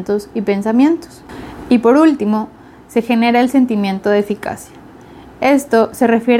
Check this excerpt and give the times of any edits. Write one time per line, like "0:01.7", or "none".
none